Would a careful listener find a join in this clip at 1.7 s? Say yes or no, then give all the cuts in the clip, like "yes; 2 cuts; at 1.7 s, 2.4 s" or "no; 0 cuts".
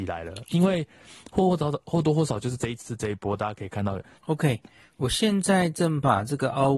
no; 1 cut; at 4.1 s